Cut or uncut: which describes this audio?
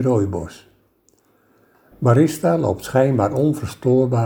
cut